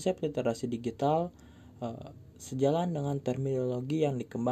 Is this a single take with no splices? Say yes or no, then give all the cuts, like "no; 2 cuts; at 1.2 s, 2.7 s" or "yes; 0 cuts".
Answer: yes; 0 cuts